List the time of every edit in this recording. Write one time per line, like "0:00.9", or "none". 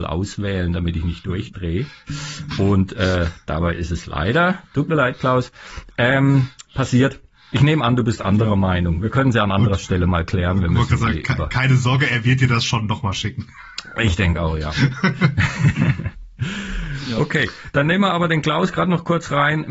none